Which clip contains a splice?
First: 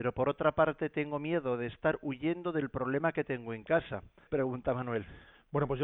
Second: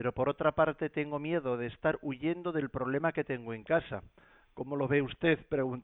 first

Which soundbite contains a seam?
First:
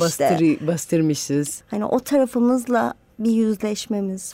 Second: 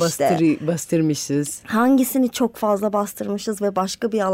first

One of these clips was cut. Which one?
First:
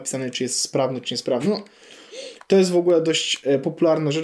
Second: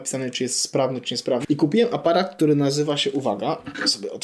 second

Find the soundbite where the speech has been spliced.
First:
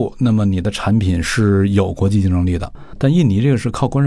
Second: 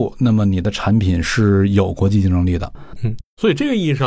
second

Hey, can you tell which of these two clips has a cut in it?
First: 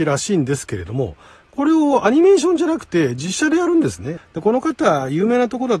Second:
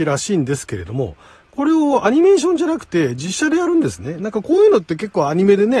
first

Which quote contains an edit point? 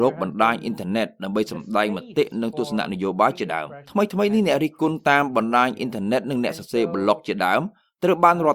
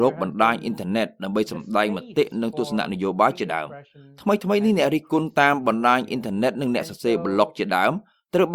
first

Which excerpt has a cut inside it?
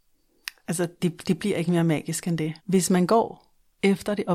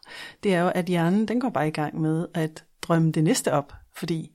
first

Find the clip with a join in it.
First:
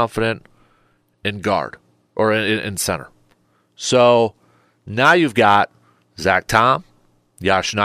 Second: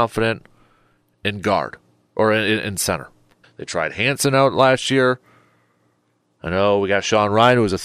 second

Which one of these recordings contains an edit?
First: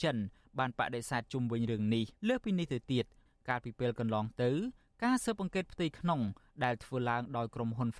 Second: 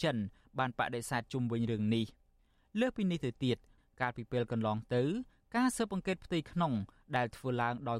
first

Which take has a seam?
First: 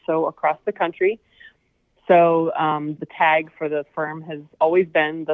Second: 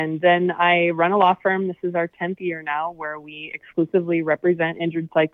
first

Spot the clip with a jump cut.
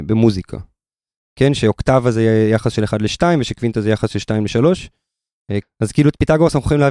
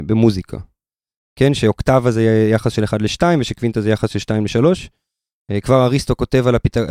first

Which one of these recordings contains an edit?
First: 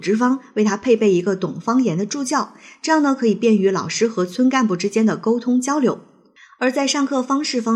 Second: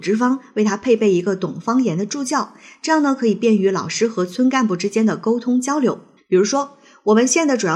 second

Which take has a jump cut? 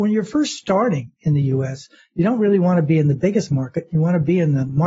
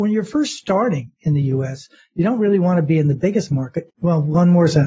second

